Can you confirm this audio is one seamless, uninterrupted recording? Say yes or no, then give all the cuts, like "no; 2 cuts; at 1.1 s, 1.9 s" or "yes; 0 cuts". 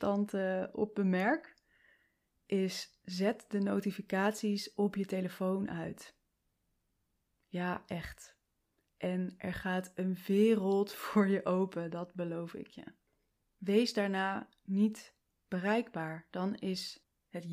no; 1 cut; at 13.4 s